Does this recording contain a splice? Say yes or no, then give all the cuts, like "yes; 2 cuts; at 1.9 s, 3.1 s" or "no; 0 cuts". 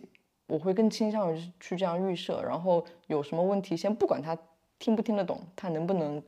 no; 0 cuts